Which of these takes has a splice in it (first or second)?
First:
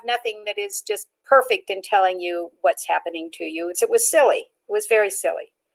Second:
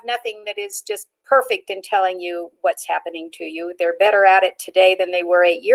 first